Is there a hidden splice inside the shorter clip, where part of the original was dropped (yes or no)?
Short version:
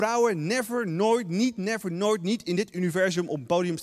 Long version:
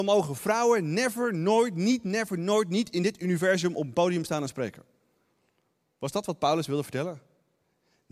no